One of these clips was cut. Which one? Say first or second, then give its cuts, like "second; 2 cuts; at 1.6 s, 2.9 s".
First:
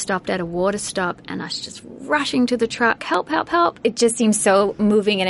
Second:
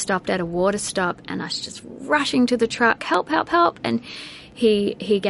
first; 1 cut; at 3.8 s